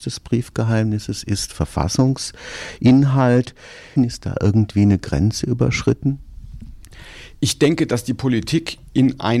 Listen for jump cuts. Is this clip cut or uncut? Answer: cut